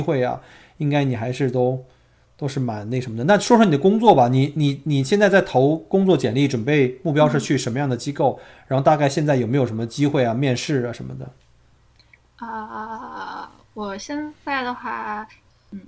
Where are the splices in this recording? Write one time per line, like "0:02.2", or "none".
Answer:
none